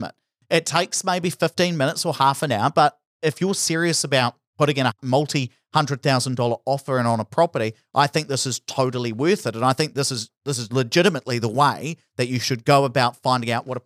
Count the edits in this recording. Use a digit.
0